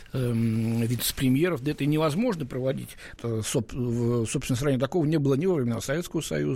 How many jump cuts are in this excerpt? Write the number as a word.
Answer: one